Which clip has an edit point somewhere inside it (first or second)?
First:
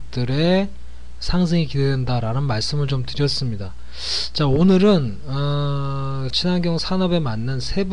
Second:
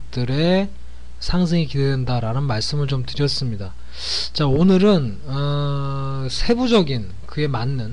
first